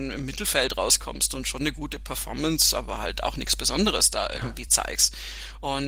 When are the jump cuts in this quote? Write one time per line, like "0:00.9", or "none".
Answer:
none